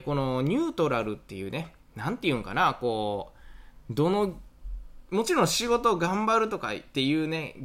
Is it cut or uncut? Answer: uncut